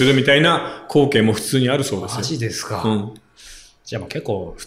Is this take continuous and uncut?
yes; 0 cuts

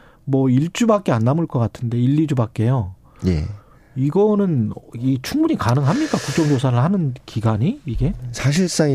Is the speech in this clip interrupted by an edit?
no; 0 cuts

